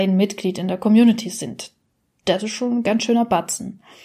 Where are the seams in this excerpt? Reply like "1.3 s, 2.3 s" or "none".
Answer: none